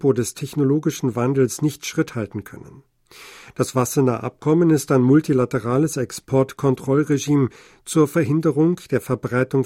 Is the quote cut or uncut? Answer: uncut